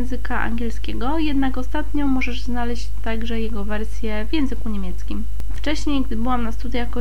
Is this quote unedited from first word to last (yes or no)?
no